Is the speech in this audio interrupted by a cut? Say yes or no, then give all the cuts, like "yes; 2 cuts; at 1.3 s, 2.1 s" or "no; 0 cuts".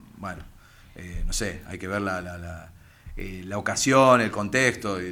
no; 0 cuts